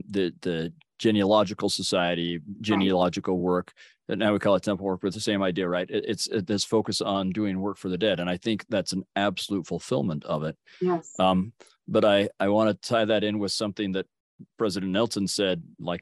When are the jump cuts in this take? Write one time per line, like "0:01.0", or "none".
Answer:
none